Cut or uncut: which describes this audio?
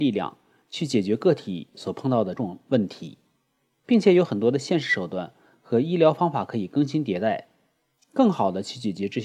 cut